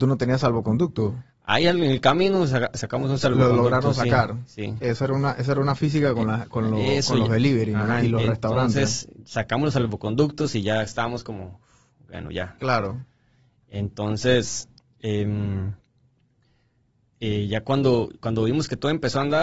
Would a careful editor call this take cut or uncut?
uncut